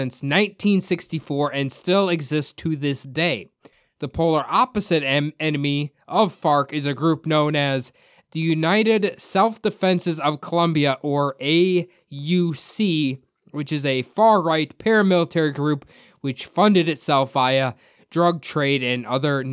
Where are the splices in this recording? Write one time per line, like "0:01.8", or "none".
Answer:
none